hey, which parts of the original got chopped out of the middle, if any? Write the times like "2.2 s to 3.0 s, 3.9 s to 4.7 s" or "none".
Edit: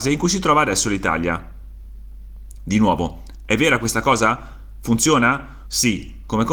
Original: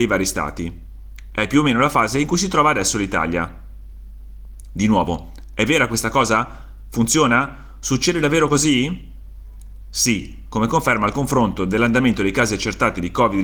7.7 s to 9.9 s